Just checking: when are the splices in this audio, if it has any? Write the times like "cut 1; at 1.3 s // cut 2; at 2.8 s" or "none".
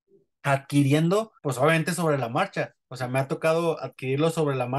cut 1; at 1.4 s